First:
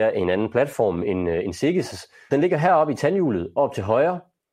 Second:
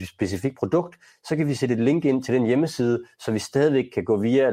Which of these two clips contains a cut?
first; 1 cut; at 2.3 s

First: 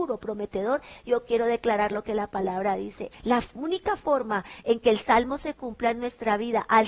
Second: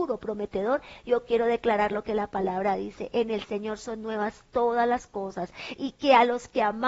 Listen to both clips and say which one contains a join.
first; 1 cut; at 3.1 s

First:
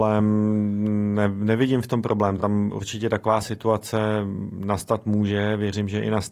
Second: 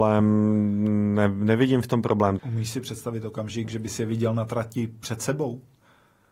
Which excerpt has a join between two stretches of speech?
second; 1 cut; at 2.4 s

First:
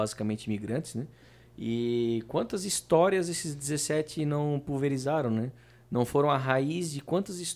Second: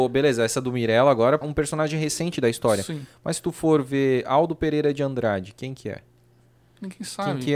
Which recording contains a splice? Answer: second; 1 cut; at 1.4 s

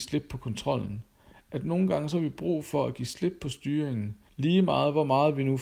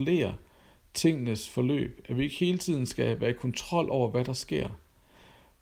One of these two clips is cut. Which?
first; 1 cut; at 4.3 s

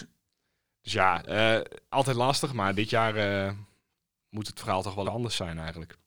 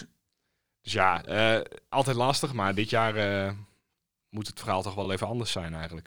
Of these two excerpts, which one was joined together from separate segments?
first; 1 cut; at 5.0 s

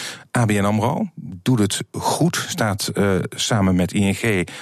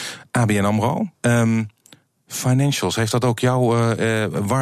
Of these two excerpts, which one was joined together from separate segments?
second; 1 cut; at 1.1 s

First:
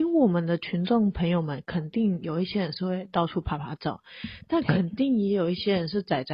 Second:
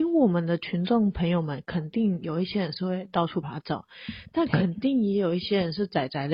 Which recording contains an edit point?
second; 1 cut; at 3.4 s

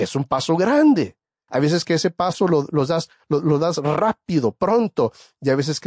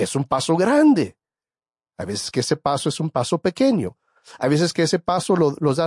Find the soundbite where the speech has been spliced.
first; 1 cut; at 1.5 s

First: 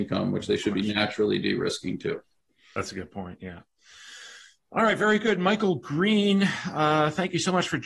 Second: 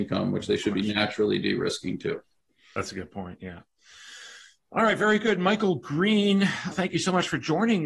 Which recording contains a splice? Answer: second; 1 cut; at 6.7 s

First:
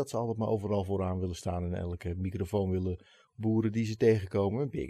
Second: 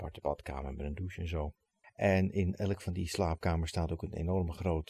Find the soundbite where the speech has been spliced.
second; 1 cut; at 1.8 s

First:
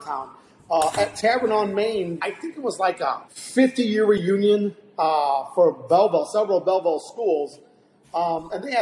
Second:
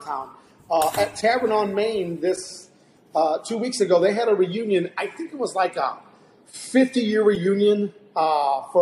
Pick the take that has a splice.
first; 2 cuts; at 2.2 s, 3.3 s

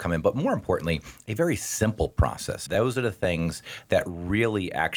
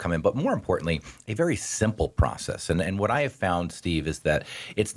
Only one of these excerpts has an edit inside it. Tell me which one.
first; 1 cut; at 2.7 s

